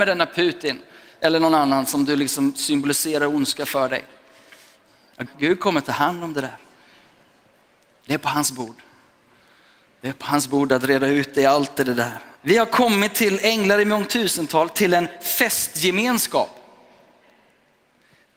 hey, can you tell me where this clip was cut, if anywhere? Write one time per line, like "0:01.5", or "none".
0:05.3
0:12.3